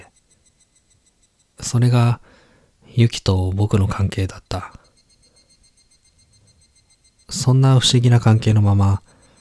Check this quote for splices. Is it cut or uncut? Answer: uncut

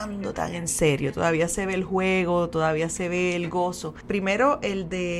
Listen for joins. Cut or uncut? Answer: cut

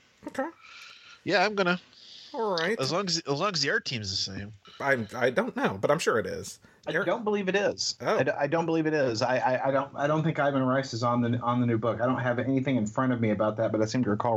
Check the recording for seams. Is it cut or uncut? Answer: uncut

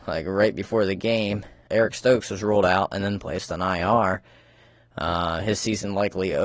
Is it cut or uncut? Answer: cut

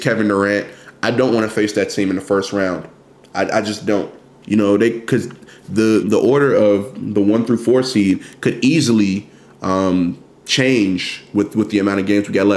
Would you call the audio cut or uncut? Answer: cut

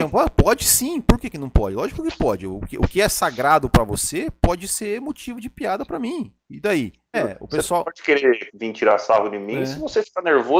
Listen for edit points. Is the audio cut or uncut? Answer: cut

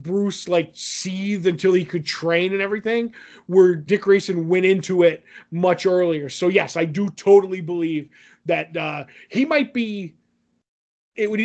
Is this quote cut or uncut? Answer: cut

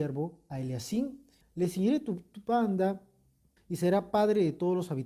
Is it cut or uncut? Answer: cut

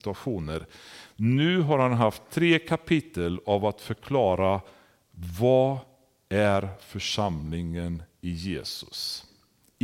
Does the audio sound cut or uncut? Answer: uncut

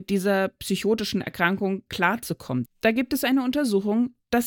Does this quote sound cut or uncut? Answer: cut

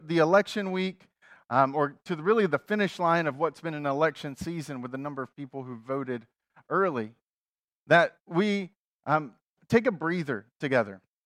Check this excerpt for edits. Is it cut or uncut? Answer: uncut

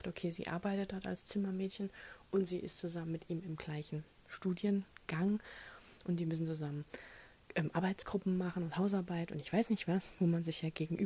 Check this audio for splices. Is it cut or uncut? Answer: uncut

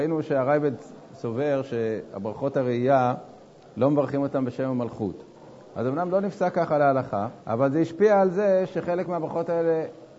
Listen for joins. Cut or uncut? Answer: cut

